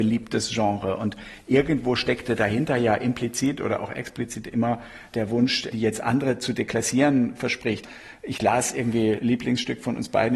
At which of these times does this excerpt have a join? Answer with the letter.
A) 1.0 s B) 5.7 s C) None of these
B